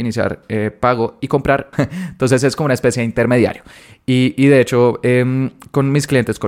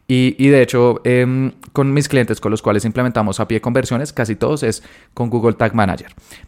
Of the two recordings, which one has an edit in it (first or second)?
first